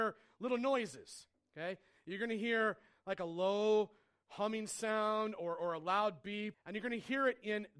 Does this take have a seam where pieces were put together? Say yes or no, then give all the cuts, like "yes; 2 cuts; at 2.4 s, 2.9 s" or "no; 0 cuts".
yes; 1 cut; at 6.5 s